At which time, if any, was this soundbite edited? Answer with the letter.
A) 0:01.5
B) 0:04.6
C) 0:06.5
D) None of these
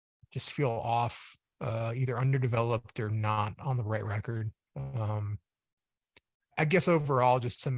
C